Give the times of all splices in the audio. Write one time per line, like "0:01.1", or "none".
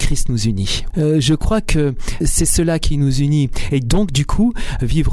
0:00.9
0:02.2
0:03.7

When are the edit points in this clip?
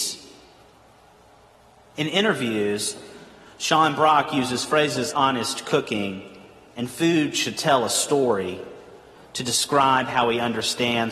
0:05.1

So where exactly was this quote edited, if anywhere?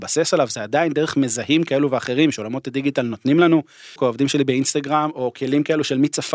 0:04.0

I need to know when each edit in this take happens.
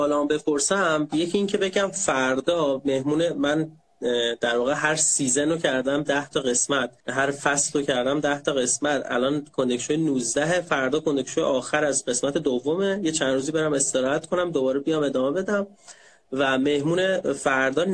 0:07.0

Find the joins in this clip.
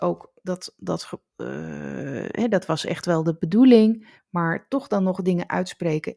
0:01.3
0:04.2

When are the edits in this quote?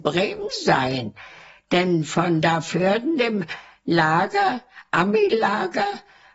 none

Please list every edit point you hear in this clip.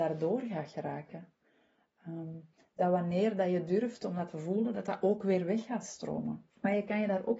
0:06.5

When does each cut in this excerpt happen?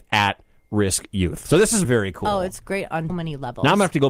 0:01.8
0:03.1

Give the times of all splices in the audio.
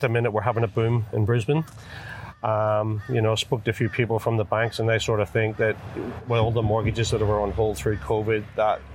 none

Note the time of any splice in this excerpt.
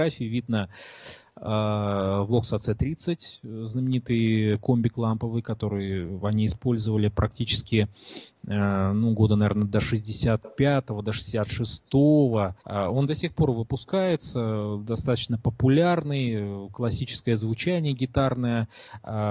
0:12.6

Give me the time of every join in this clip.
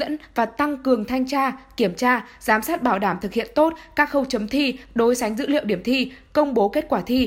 none

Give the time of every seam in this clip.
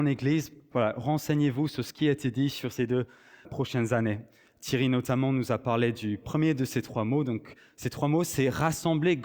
0:03.4

